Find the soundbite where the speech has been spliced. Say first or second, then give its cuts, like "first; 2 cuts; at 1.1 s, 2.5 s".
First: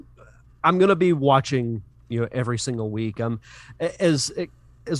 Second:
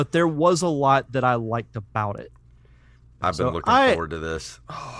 second; 1 cut; at 3.2 s